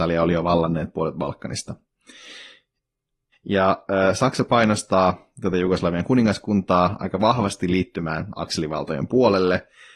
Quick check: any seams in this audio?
yes; 1 cut; at 3.3 s

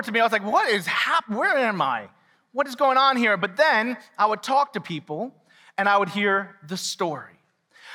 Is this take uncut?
yes; 0 cuts

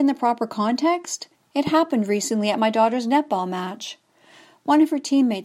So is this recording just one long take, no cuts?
no; 1 cut; at 1.3 s

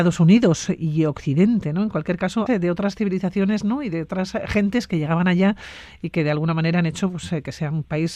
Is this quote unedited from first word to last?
no; 1 cut; at 2.5 s

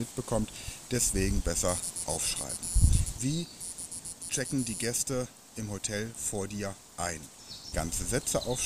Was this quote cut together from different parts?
yes; 2 cuts; at 3.2 s, 7.7 s

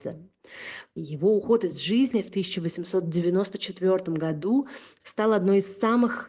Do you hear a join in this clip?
yes; 2 cuts; at 1.0 s, 5.0 s

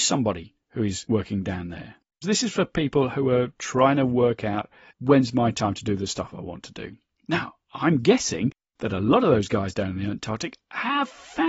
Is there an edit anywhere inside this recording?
yes; 1 cut; at 2.2 s

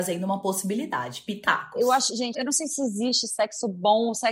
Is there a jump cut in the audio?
yes; 1 cut; at 2.3 s

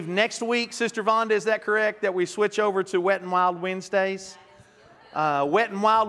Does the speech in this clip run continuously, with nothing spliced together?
yes; 0 cuts

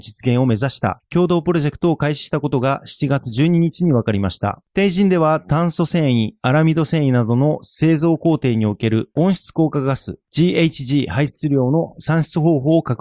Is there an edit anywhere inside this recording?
no; 0 cuts

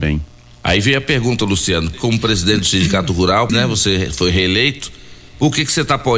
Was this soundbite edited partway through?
yes; 2 cuts; at 1.9 s, 3.5 s

